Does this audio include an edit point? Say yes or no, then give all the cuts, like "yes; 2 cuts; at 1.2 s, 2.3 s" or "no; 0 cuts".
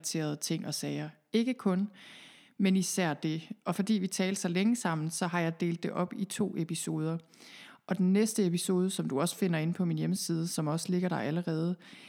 no; 0 cuts